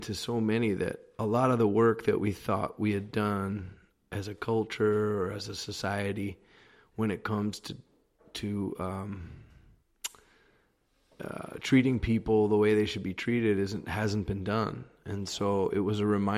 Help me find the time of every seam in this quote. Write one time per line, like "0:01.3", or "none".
none